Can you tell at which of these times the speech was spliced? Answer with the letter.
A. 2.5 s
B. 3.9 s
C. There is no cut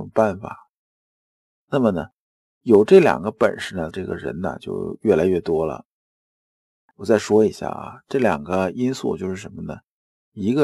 B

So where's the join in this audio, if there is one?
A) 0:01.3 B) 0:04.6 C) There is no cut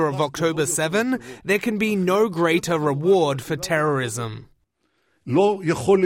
C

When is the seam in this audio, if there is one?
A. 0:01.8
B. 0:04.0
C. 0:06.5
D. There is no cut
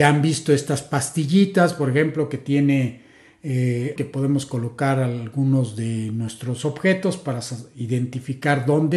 B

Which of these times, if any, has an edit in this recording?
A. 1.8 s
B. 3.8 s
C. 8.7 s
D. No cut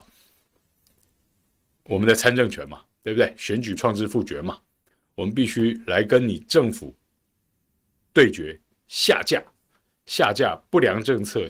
B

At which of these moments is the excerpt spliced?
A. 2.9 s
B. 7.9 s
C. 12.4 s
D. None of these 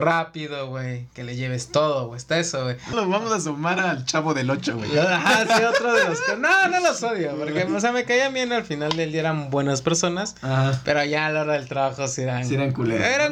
A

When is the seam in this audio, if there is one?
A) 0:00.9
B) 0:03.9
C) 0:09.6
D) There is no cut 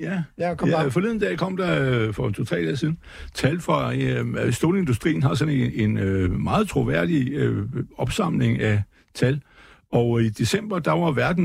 D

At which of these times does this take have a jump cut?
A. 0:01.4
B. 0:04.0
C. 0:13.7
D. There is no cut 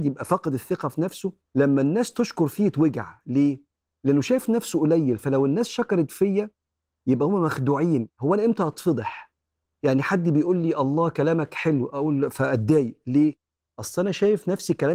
A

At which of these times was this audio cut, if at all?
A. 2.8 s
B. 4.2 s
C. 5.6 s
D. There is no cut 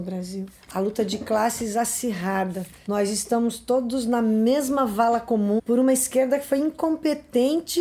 C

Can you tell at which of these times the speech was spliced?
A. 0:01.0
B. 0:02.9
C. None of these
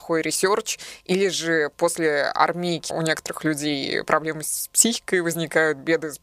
B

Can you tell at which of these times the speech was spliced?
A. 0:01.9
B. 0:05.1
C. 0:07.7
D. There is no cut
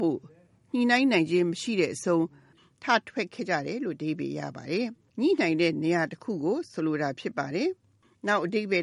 B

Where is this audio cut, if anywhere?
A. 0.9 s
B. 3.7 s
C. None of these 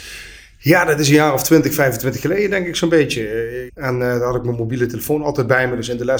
B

